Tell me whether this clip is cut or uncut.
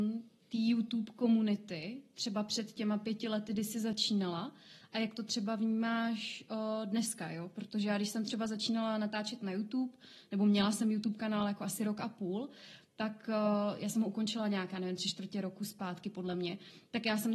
uncut